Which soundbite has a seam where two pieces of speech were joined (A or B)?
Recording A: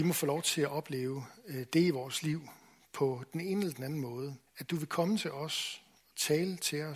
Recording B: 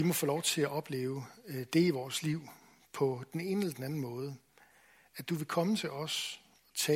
A